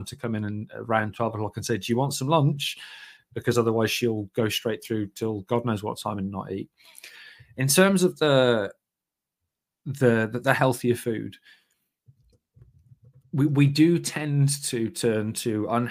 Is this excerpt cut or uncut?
uncut